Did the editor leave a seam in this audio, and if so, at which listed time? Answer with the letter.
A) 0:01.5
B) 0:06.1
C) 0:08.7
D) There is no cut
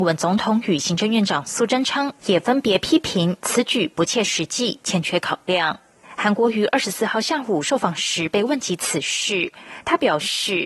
D